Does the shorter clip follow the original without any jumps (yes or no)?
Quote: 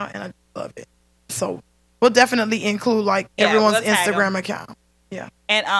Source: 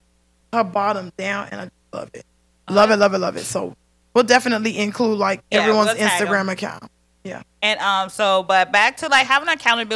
no